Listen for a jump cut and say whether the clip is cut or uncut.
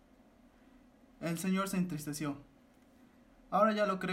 uncut